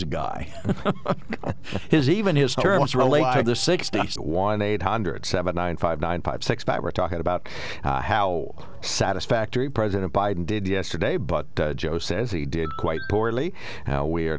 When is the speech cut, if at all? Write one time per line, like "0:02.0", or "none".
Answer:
0:04.2